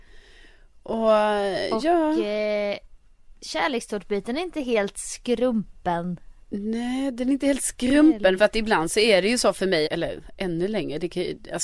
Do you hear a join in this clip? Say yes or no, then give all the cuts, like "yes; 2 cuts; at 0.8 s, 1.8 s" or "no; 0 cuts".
yes; 3 cuts; at 6.4 s, 8.4 s, 9.9 s